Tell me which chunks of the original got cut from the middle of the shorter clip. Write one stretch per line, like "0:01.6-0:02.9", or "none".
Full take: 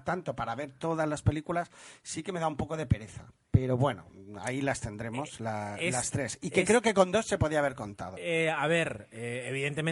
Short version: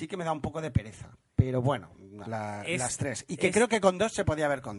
0:04.4-0:05.4